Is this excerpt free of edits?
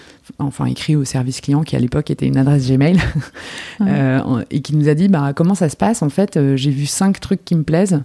yes; 0 cuts

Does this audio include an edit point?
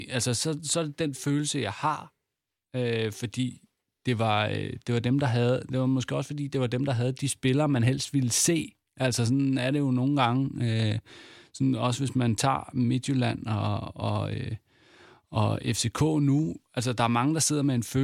no; 0 cuts

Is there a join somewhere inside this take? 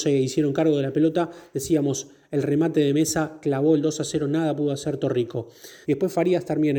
yes; 1 cut; at 5.8 s

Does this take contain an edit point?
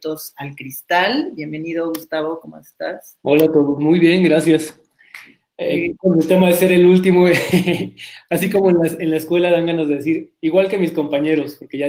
no; 0 cuts

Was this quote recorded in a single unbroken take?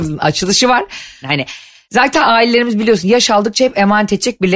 no; 1 cut; at 1.2 s

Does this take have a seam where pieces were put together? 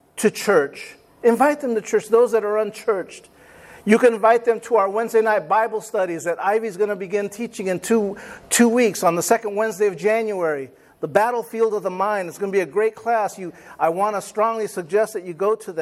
no; 0 cuts

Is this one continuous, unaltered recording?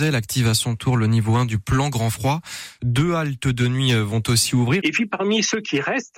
no; 2 cuts; at 2.8 s, 4.8 s

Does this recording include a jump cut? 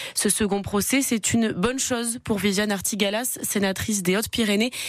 no; 0 cuts

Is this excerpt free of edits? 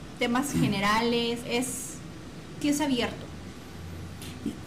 no; 2 cuts; at 1.4 s, 2.6 s

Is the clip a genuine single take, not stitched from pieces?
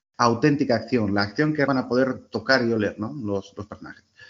no; 1 cut; at 1.7 s

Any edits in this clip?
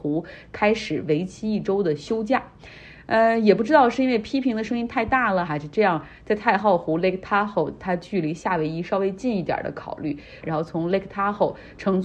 yes; 2 cuts; at 5.5 s, 10.4 s

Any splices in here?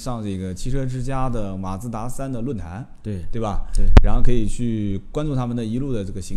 no; 0 cuts

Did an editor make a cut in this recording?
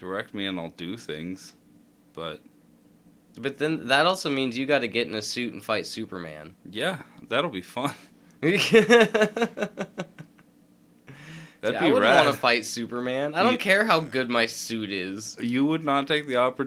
no; 0 cuts

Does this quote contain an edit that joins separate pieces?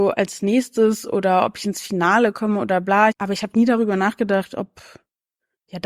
yes; 1 cut; at 3.1 s

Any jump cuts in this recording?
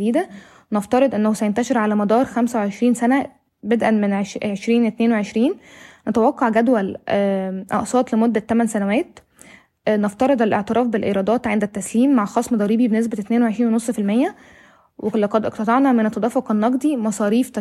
no; 0 cuts

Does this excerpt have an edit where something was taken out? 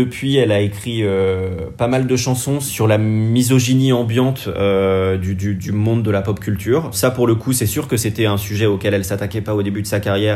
no; 0 cuts

